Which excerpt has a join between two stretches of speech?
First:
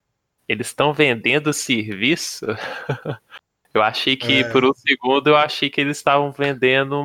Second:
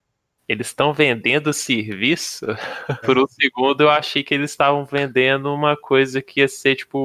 second; 1 cut; at 3.0 s

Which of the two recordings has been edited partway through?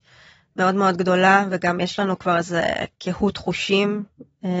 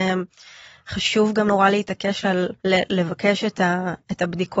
second; 2 cuts; at 1.5 s, 2.6 s

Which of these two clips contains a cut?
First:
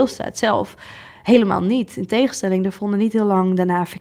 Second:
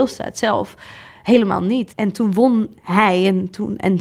second; 1 cut; at 1.9 s

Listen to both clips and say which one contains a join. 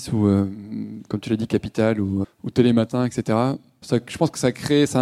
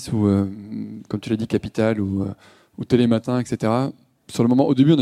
first; 2 cuts; at 2.2 s, 3.8 s

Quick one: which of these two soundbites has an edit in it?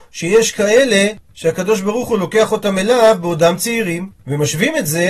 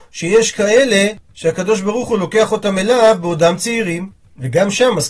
first; 1 cut; at 4.2 s

